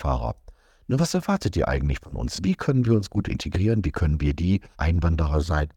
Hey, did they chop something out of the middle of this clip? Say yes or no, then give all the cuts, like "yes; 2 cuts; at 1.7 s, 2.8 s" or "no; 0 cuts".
no; 0 cuts